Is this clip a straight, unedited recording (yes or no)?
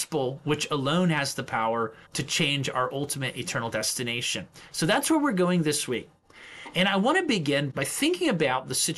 no